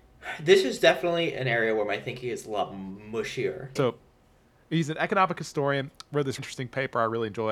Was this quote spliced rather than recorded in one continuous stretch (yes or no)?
yes